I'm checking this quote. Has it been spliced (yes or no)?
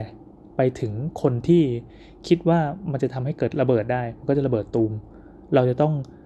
no